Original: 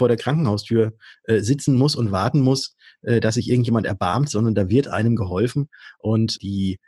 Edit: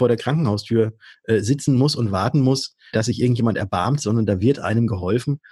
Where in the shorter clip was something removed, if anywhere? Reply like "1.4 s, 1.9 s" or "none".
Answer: 2.9 s